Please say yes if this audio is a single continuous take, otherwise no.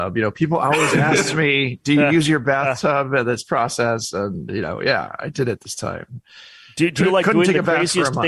yes